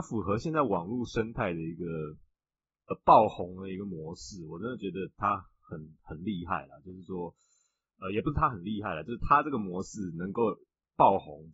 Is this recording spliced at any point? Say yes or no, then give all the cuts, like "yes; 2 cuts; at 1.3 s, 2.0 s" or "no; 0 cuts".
no; 0 cuts